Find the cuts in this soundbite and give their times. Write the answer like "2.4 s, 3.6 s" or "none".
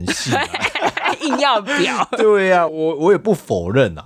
2.7 s